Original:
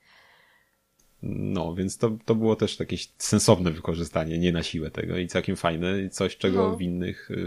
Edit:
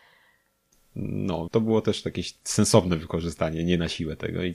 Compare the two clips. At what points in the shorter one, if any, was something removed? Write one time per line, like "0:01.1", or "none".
0:01.5